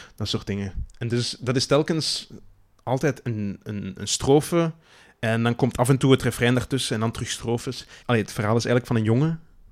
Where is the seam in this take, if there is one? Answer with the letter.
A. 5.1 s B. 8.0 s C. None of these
B